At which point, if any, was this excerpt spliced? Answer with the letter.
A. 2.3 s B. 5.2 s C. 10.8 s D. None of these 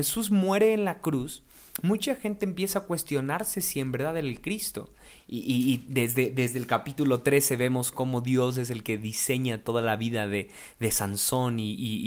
B